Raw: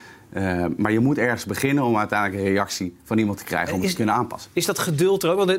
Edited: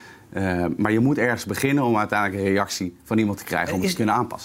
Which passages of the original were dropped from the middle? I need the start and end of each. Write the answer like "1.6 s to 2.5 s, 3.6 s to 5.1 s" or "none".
none